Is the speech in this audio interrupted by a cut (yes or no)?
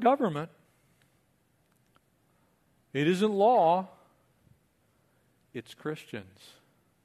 no